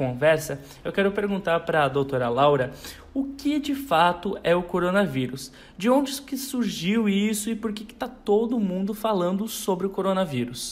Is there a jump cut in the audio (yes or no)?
no